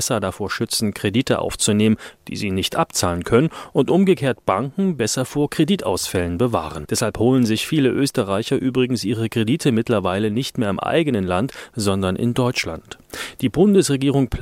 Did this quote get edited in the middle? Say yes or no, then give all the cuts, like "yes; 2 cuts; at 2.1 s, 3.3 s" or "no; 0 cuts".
yes; 1 cut; at 6.8 s